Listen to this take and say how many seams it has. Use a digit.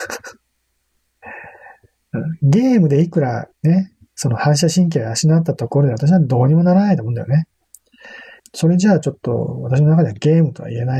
1